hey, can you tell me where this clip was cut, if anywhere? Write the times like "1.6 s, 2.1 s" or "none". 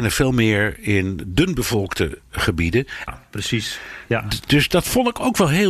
3.1 s